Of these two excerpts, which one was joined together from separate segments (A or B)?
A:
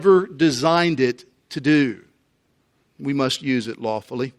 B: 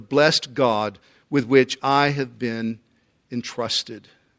A